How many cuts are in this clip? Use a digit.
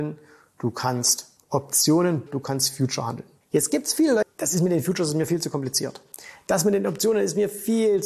2